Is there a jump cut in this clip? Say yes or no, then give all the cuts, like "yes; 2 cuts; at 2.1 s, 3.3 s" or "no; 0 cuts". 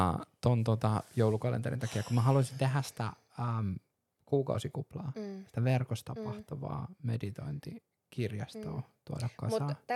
no; 0 cuts